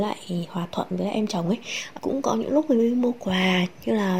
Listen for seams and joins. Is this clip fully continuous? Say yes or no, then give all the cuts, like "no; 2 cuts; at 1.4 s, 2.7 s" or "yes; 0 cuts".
no; 1 cut; at 2.0 s